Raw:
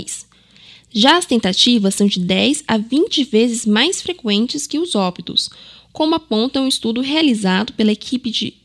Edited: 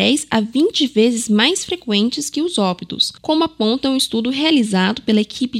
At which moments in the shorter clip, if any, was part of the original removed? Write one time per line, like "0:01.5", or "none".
0:03.2